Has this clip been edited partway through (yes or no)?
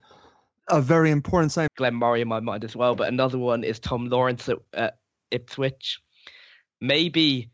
yes